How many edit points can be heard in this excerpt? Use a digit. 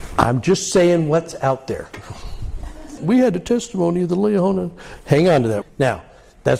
2